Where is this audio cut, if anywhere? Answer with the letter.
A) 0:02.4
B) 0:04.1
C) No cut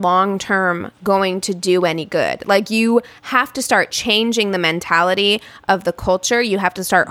C